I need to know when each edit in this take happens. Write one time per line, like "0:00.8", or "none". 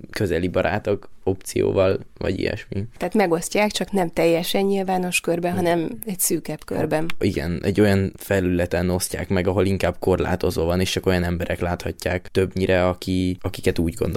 none